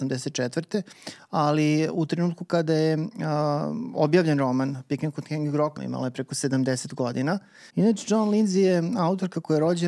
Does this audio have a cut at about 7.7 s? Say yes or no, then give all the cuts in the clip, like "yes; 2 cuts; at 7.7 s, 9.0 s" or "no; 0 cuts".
yes; 2 cuts; at 5.8 s, 7.7 s